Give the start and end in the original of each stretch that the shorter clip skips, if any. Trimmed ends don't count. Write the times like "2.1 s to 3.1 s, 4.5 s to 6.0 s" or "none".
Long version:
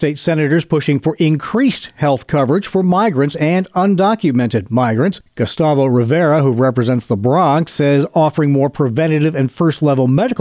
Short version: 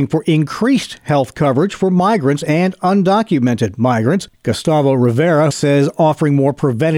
6.4 s to 7.7 s